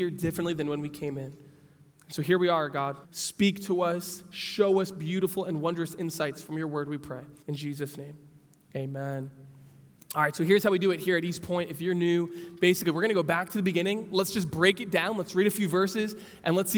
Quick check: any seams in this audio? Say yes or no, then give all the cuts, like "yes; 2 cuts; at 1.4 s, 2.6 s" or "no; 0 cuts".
yes; 2 cuts; at 3.0 s, 7.4 s